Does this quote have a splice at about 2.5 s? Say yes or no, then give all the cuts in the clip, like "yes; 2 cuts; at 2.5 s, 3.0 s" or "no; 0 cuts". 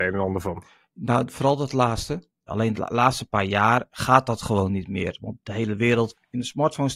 yes; 1 cut; at 2.5 s